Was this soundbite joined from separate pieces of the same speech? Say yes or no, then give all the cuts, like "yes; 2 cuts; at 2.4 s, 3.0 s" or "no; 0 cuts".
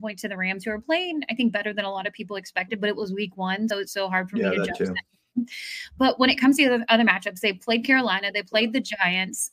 yes; 1 cut; at 3.7 s